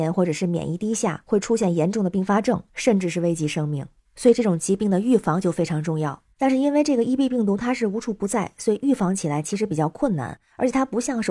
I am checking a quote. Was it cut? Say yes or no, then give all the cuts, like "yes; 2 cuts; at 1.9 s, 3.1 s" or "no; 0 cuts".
no; 0 cuts